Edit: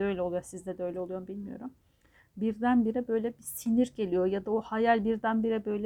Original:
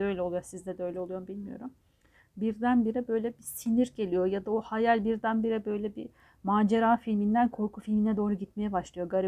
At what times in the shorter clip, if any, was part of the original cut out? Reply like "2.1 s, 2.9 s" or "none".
none